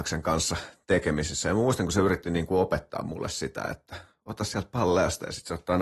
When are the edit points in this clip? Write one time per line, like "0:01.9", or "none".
none